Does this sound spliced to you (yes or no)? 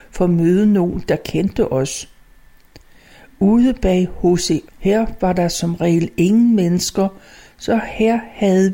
yes